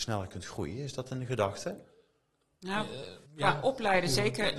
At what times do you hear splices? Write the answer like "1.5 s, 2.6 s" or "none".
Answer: 3.3 s